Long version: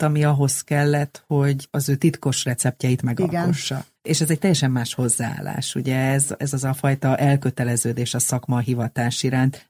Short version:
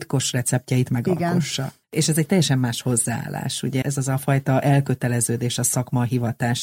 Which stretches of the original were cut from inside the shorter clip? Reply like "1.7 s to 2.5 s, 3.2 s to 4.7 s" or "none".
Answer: 5.9 s to 6.4 s